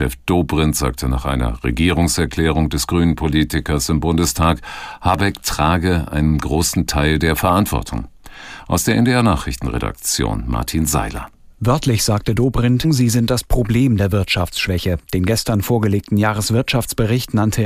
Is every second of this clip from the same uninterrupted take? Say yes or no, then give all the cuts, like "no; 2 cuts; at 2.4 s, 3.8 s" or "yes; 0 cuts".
no; 1 cut; at 12.8 s